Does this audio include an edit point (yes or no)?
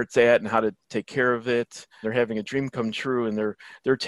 yes